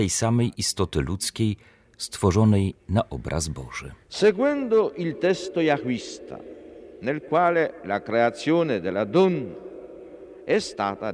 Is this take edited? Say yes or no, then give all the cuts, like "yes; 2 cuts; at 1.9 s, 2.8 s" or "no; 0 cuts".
no; 0 cuts